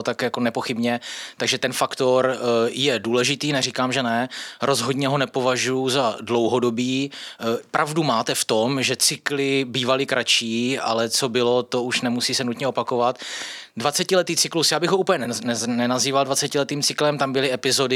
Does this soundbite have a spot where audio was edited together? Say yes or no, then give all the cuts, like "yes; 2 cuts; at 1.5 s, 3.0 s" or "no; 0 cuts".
no; 0 cuts